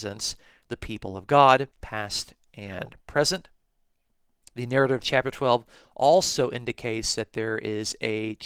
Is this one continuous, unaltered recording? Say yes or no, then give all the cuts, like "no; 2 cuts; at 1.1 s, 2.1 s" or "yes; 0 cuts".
no; 1 cut; at 1.7 s